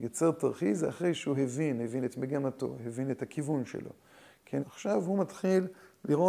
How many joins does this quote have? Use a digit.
1